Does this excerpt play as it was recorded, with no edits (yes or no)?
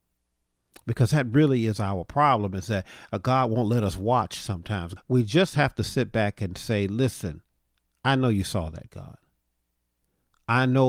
no